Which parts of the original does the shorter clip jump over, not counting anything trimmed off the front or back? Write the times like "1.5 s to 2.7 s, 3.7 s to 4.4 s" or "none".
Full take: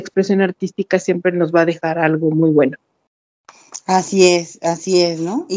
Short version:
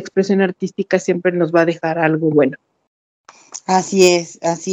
2.3 s to 2.5 s